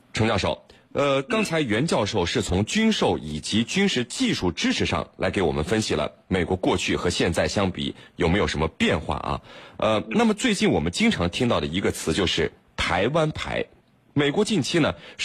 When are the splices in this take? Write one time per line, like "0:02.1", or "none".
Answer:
none